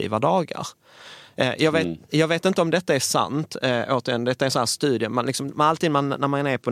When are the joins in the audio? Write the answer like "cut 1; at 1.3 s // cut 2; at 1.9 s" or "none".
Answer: none